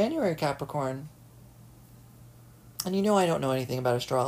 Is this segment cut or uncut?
uncut